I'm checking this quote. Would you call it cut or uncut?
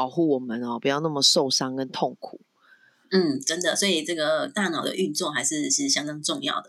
uncut